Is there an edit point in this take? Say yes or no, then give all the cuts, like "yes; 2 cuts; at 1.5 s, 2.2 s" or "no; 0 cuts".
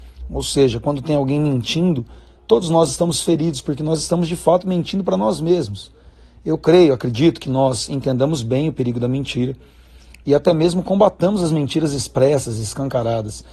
no; 0 cuts